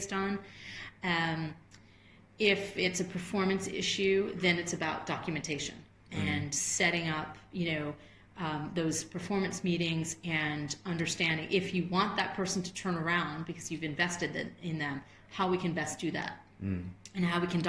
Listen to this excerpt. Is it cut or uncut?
uncut